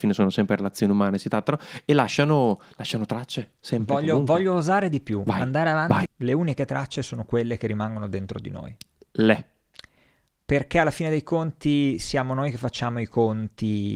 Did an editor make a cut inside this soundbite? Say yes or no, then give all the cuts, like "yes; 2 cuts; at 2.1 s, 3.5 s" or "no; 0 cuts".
yes; 1 cut; at 6.1 s